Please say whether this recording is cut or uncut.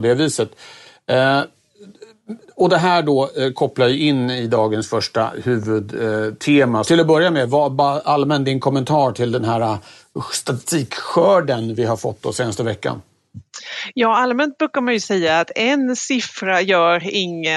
cut